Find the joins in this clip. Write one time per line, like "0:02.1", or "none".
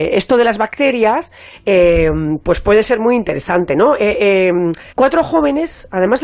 0:04.9

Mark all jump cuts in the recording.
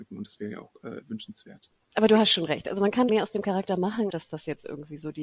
0:03.1
0:04.1

